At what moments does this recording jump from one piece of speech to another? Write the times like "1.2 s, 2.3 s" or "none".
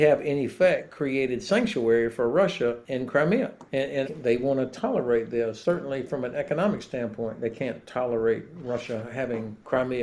4.0 s